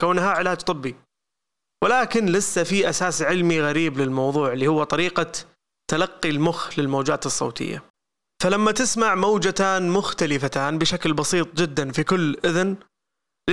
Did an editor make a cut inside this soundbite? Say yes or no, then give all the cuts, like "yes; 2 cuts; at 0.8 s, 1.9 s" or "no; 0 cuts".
no; 0 cuts